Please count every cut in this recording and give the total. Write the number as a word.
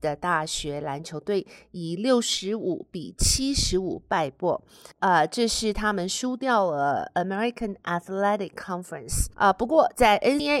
zero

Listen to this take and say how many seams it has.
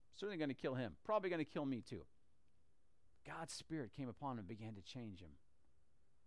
one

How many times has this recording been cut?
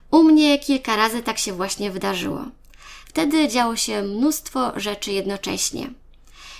one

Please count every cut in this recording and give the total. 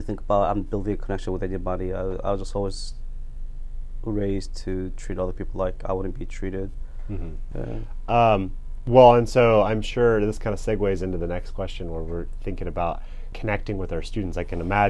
two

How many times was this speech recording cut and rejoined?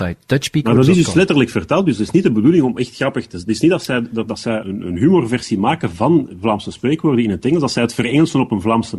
one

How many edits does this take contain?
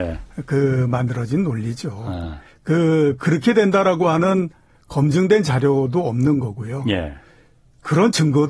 zero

